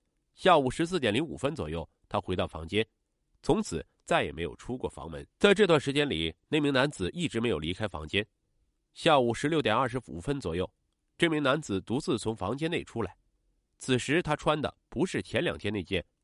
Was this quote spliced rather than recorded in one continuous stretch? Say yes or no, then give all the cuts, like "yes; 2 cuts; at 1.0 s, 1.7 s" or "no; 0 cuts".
yes; 2 cuts; at 5.3 s, 13.6 s